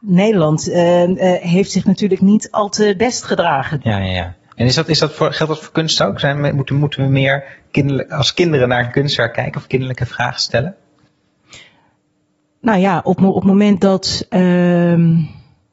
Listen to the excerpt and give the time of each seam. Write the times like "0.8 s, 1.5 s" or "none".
3.8 s